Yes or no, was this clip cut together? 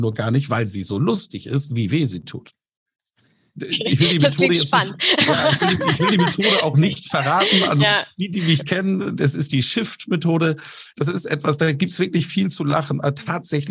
no